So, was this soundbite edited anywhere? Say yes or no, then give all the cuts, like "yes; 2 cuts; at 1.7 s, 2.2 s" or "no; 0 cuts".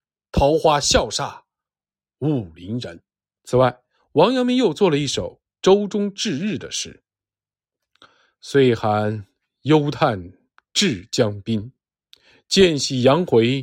yes; 1 cut; at 3.4 s